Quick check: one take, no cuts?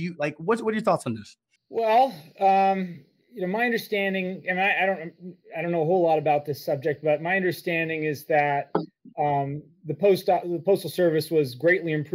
no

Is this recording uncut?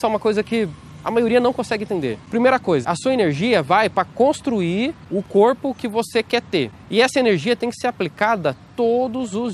no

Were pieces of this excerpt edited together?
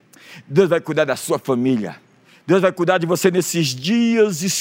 no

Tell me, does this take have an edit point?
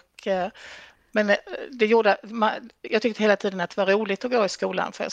no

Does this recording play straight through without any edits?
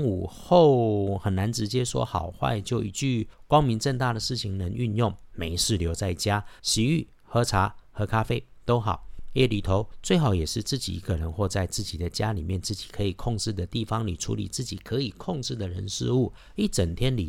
no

